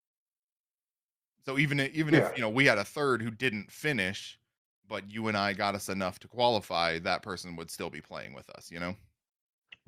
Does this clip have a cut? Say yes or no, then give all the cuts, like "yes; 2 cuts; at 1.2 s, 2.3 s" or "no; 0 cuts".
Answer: no; 0 cuts